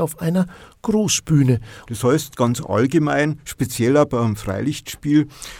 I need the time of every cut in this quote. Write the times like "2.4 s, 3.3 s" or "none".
1.8 s